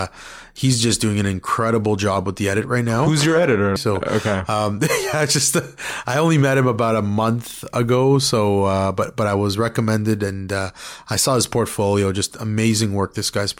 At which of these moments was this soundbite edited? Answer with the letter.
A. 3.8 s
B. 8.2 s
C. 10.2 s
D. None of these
A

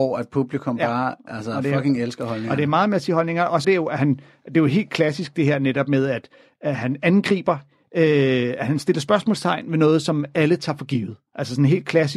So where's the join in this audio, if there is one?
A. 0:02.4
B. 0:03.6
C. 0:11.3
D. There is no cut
B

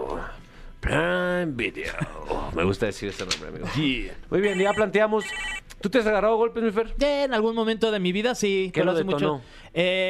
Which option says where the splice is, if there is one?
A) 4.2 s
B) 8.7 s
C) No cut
A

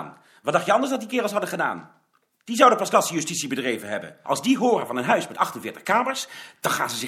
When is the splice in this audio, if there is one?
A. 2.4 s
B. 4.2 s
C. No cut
B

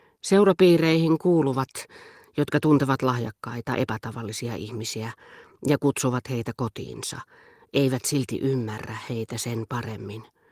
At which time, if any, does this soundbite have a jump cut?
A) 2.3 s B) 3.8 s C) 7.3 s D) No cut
D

